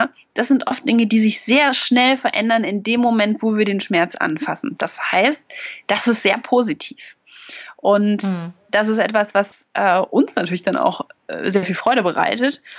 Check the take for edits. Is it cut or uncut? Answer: uncut